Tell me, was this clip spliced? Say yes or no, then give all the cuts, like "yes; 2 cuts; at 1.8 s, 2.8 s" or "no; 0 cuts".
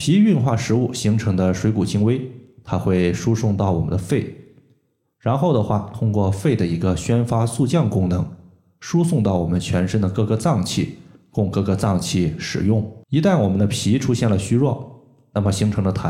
yes; 1 cut; at 13.0 s